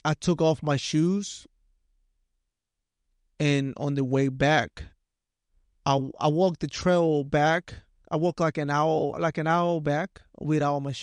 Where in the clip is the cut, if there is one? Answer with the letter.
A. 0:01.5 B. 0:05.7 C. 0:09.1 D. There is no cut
C